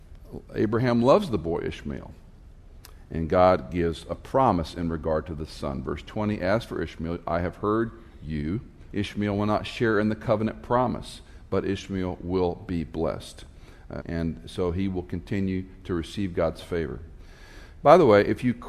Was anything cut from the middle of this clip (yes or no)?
yes